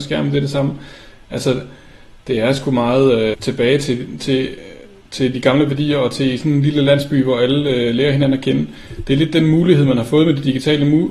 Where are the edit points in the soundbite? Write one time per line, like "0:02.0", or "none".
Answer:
0:03.3